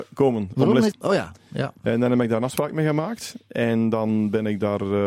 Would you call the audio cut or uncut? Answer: cut